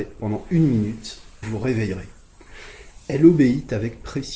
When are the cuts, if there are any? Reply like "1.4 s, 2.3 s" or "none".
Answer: 1.4 s